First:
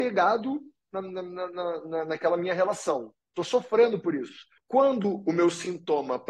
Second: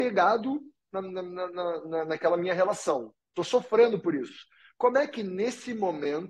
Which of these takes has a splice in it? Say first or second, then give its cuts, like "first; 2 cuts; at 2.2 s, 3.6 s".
first; 1 cut; at 4.6 s